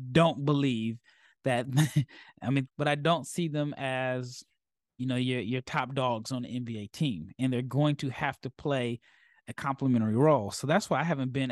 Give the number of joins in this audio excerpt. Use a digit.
1